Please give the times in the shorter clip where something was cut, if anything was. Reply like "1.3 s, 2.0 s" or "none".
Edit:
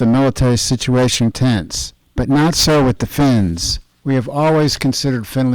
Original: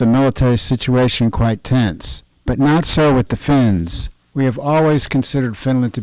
1.3 s